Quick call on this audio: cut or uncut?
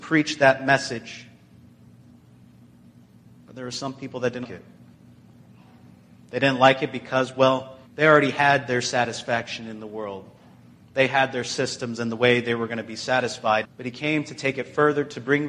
cut